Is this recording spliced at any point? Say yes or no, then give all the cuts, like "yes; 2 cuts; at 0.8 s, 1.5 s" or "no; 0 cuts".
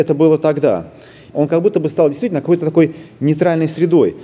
yes; 1 cut; at 1.3 s